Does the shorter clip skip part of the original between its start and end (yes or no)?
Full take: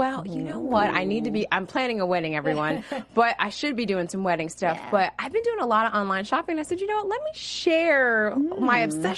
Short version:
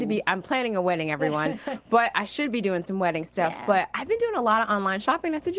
no